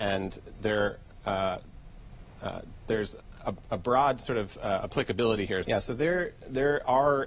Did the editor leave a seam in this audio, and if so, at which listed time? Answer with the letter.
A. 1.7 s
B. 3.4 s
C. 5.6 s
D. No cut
C